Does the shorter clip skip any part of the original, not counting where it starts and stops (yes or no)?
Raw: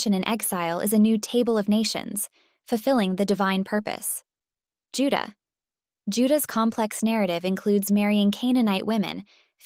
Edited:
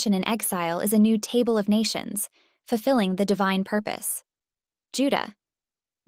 no